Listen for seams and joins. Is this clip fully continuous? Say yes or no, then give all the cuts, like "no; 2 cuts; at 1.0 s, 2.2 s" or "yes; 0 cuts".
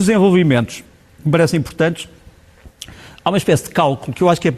yes; 0 cuts